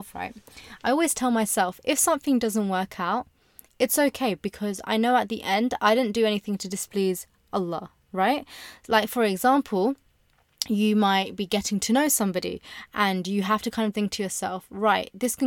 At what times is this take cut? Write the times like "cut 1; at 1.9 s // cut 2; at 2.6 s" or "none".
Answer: cut 1; at 13.9 s